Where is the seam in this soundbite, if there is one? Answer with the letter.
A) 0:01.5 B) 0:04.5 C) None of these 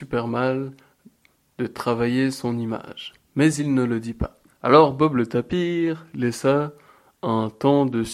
B